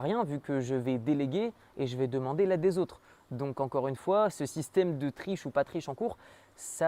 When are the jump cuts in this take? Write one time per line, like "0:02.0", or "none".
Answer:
none